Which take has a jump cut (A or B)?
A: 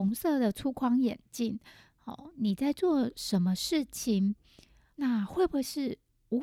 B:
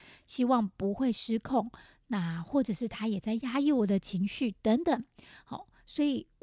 A